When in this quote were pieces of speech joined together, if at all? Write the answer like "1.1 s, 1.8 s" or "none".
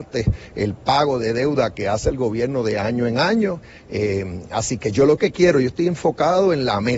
none

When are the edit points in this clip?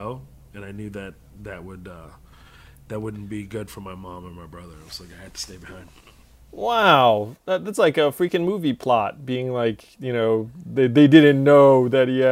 none

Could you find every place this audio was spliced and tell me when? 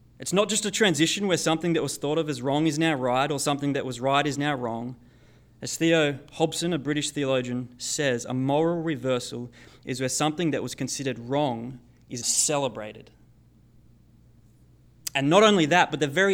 12.2 s

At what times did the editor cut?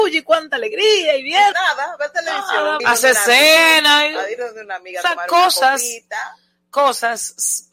1.5 s, 2.8 s

